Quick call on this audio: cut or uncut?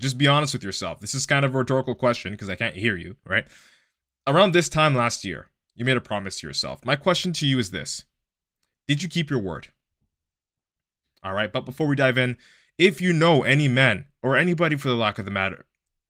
cut